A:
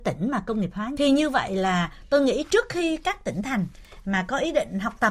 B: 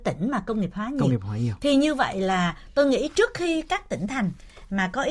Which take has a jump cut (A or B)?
A